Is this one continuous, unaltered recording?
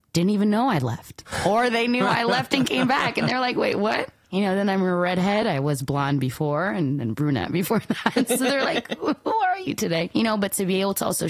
yes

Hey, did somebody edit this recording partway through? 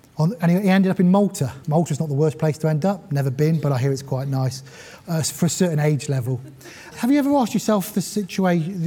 yes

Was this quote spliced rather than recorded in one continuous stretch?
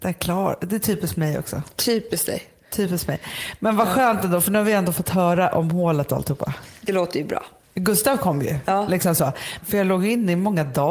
yes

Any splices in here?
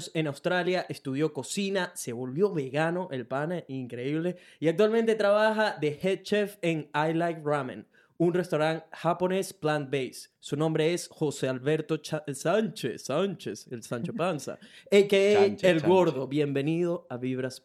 no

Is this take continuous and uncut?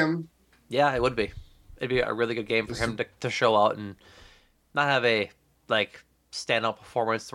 no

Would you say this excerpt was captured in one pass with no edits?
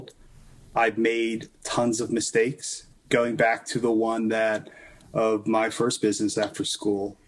yes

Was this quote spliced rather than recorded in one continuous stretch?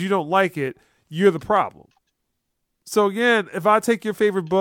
no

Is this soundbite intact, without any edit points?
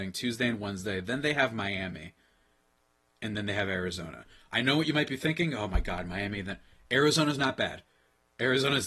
yes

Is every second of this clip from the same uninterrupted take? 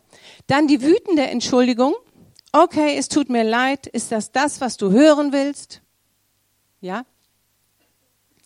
yes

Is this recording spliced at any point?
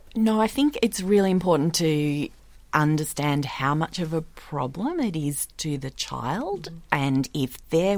no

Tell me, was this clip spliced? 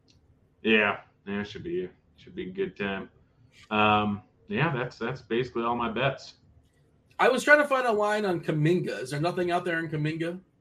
no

